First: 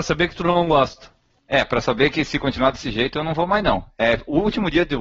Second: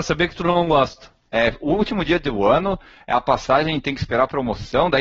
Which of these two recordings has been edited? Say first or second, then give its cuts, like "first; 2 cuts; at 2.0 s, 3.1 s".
second; 1 cut; at 1.3 s